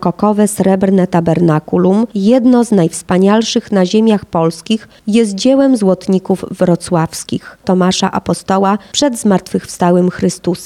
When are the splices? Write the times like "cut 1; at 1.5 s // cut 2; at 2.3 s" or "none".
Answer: cut 1; at 7.6 s